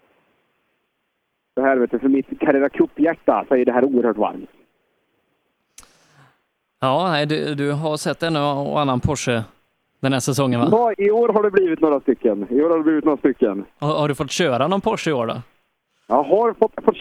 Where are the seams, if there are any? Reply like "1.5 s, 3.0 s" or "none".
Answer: 10.9 s